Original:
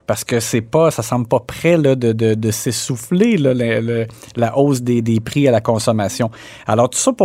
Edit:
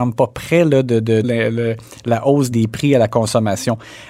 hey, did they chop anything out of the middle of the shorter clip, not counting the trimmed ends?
yes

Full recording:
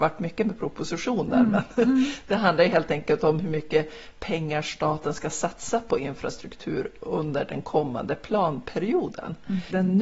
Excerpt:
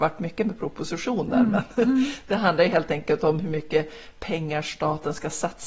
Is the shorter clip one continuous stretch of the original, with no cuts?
yes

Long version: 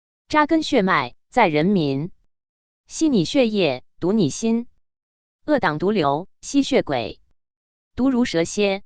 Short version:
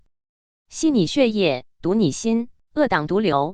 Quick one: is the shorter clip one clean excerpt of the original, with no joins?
no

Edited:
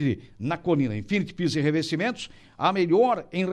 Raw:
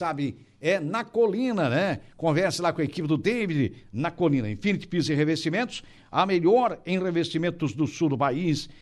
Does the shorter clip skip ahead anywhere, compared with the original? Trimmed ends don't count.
no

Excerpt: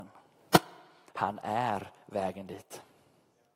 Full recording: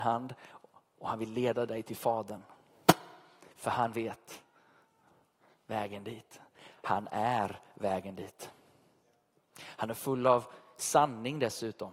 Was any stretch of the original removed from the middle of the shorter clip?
yes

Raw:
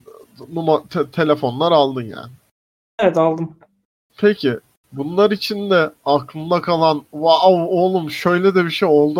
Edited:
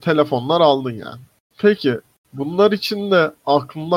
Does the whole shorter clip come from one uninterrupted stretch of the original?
no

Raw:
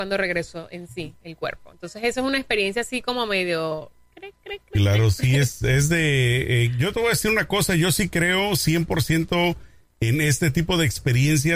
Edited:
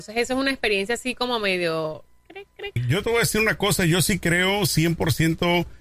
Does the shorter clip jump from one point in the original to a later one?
yes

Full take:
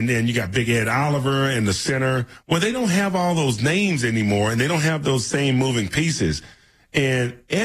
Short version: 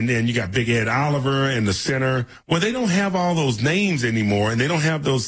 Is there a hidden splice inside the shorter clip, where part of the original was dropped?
no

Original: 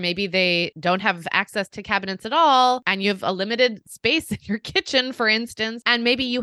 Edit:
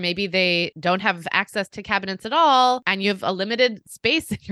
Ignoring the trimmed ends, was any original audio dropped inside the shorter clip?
no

